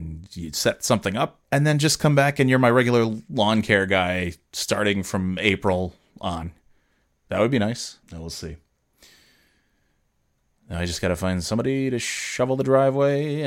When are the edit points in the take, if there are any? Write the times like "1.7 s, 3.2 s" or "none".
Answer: 1.4 s, 8.0 s